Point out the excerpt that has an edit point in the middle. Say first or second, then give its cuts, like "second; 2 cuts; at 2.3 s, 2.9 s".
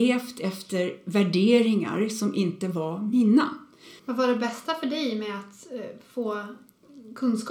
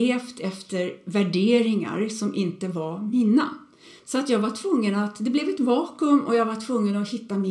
first; 1 cut; at 4.0 s